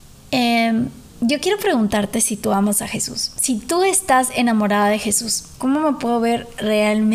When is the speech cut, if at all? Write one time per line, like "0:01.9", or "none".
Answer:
0:01.1
0:05.6